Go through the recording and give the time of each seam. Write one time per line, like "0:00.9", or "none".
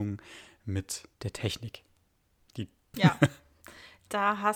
0:01.1
0:02.9